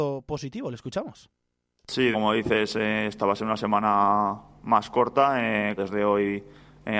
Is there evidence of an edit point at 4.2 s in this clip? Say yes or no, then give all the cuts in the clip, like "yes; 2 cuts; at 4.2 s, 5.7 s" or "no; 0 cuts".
no; 2 cuts; at 2.1 s, 5.8 s